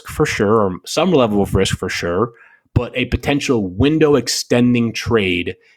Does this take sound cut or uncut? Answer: uncut